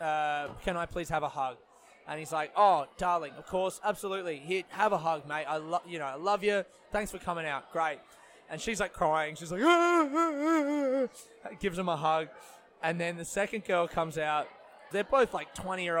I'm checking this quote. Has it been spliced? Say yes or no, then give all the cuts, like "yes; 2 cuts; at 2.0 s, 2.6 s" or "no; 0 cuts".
yes; 1 cut; at 14.9 s